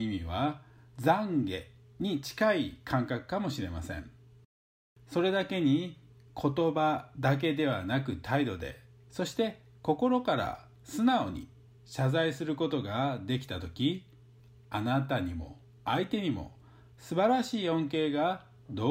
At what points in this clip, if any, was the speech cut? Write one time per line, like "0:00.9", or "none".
none